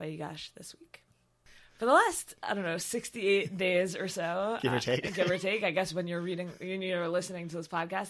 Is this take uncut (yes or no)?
yes